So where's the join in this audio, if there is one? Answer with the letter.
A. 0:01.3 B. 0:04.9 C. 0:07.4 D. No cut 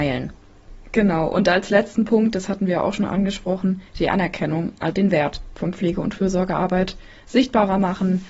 B